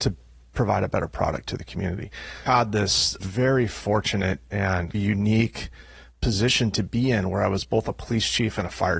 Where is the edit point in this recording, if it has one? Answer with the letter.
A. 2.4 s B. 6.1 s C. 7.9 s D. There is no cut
B